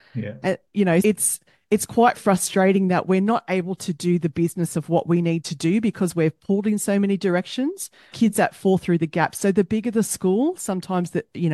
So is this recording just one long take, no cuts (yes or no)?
no